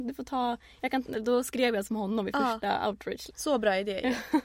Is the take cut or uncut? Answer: cut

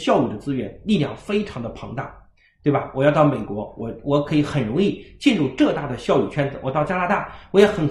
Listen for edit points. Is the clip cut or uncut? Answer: uncut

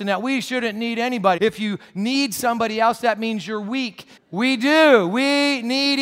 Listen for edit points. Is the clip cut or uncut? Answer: cut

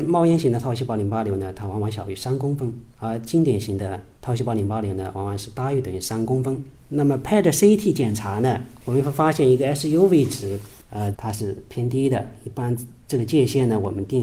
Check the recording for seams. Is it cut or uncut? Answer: cut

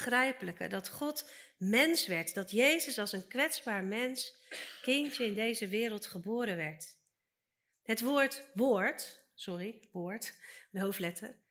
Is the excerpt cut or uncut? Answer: uncut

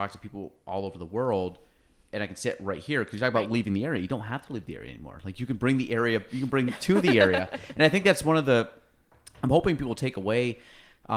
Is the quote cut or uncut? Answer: uncut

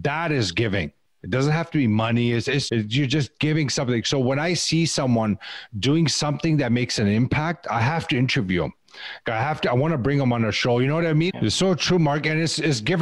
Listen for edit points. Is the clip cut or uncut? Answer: cut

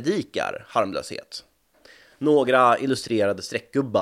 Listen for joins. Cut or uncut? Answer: cut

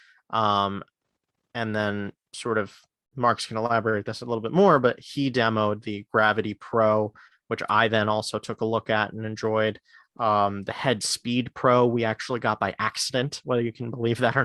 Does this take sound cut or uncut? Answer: uncut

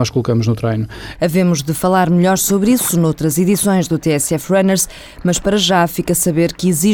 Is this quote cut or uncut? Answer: cut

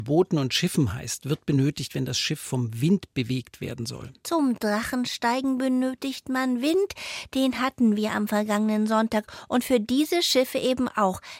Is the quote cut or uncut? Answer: uncut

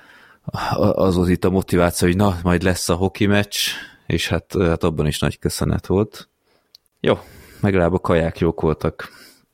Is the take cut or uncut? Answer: cut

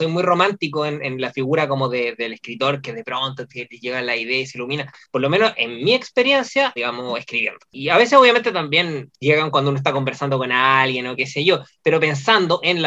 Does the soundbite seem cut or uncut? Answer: cut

